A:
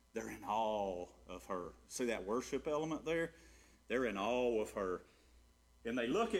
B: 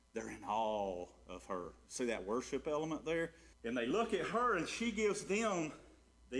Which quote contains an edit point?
B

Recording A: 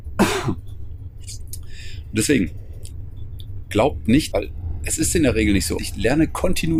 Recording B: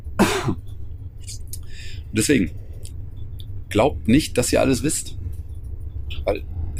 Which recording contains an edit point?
A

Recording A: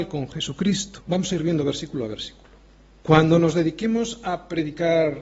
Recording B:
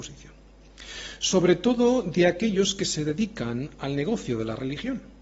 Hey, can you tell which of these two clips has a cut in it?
A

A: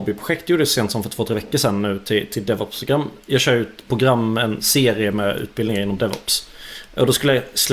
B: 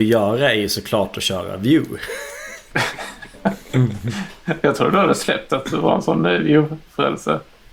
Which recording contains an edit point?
A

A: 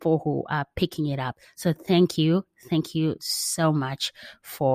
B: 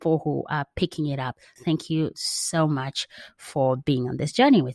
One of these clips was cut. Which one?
B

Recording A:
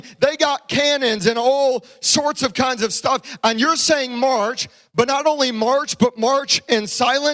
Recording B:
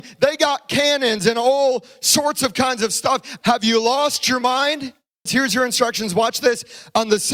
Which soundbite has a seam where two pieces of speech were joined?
B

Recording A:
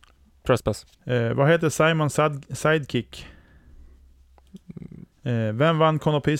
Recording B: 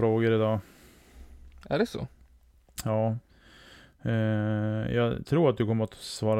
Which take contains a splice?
A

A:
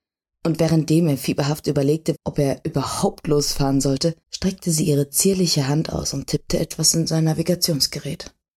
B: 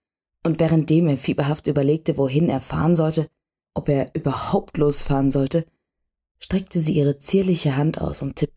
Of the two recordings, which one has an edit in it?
A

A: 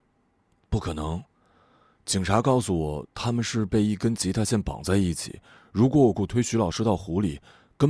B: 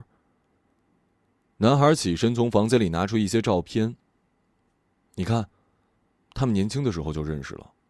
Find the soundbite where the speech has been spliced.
A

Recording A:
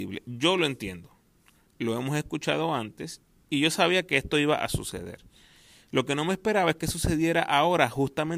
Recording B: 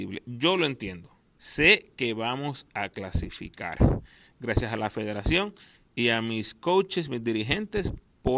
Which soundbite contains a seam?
B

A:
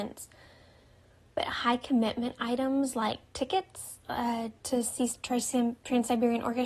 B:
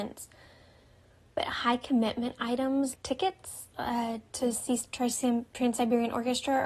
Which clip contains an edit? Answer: B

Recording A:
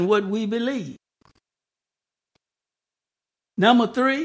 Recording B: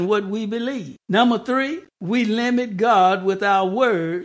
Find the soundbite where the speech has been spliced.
B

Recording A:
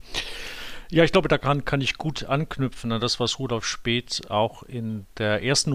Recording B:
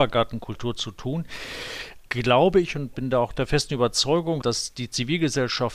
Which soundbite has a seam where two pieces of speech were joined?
B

